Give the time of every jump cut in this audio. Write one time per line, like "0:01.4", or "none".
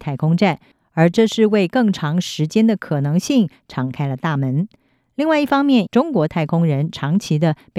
0:05.9